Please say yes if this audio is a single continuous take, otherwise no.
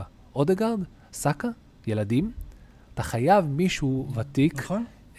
yes